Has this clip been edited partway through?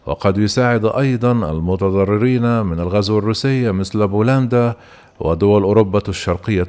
no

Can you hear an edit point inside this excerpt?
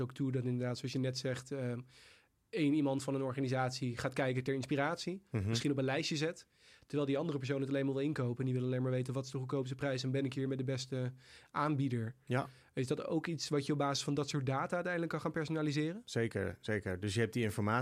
no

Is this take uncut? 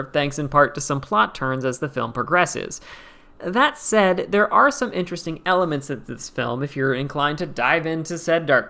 yes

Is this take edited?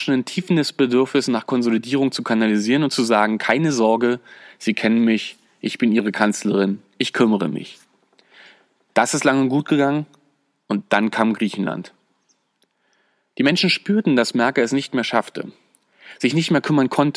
no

